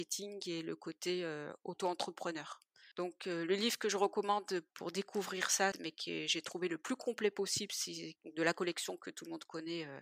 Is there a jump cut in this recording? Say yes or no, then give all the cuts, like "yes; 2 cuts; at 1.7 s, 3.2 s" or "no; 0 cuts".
yes; 3 cuts; at 2.9 s, 5.7 s, 8.2 s